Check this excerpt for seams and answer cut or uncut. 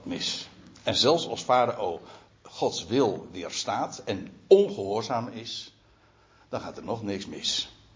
uncut